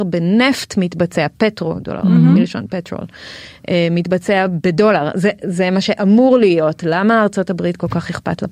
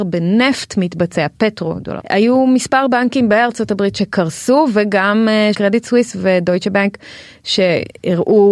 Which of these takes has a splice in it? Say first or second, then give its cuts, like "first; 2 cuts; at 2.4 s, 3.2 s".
second; 2 cuts; at 2.0 s, 5.5 s